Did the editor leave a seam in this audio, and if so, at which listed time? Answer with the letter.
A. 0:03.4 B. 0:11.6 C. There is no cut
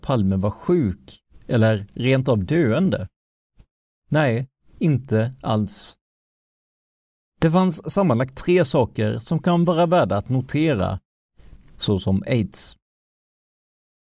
B